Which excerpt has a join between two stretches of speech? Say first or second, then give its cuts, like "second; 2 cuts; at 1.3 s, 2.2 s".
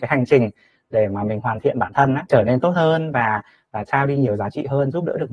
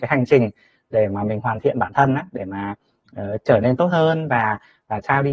first; 1 cut; at 2.3 s